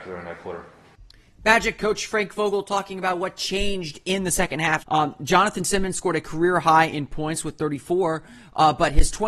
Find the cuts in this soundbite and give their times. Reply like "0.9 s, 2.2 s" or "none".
4.8 s

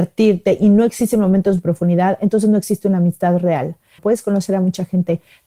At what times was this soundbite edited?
4.0 s

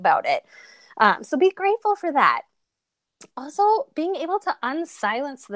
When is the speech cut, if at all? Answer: none

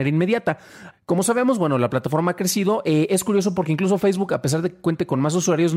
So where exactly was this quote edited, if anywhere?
0.9 s

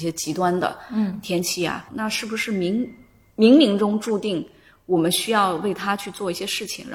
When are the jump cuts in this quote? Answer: 1.9 s

